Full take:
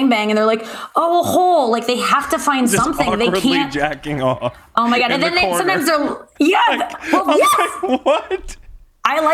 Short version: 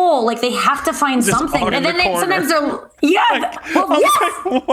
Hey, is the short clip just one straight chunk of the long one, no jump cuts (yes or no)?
no